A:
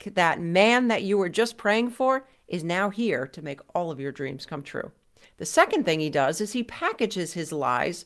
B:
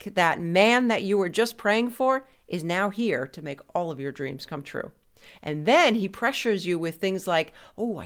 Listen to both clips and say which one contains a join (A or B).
A